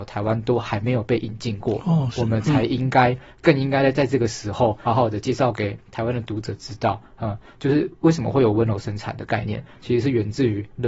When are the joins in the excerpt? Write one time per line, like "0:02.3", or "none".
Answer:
0:04.9